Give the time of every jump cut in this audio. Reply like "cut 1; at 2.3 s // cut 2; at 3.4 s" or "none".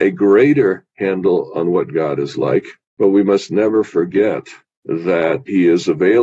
cut 1; at 2.8 s